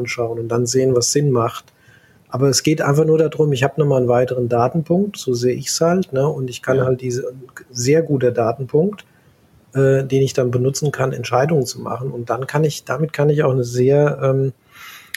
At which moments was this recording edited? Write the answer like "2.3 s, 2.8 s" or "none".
none

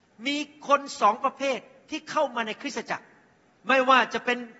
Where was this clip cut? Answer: none

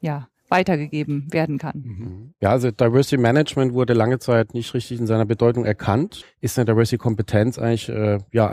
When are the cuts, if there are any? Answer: 2.3 s, 6.2 s

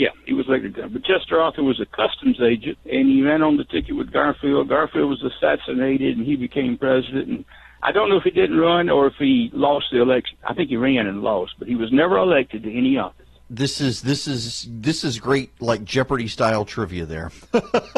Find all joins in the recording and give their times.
2.8 s, 10.3 s, 13.4 s

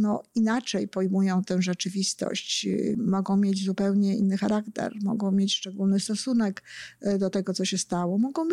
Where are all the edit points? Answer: 2.9 s

